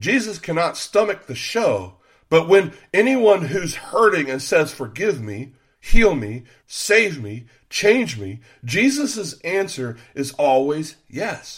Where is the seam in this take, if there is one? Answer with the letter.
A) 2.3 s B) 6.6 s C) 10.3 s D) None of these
B